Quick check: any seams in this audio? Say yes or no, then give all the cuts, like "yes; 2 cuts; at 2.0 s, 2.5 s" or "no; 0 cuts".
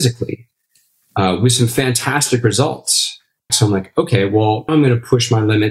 yes; 2 cuts; at 3.5 s, 4.7 s